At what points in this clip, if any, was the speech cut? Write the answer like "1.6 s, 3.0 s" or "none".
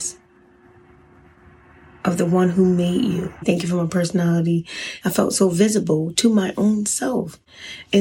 3.4 s, 5.0 s